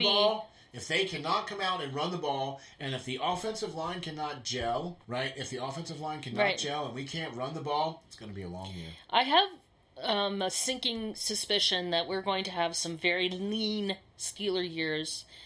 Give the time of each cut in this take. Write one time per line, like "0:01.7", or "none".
0:05.0